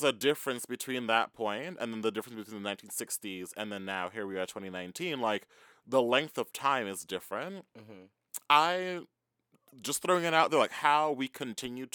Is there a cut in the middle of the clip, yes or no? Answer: no